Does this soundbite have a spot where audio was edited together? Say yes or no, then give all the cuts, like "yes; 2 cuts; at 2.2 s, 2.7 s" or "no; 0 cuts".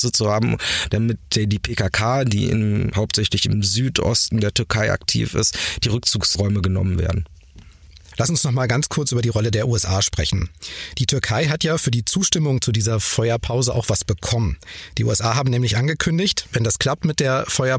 no; 0 cuts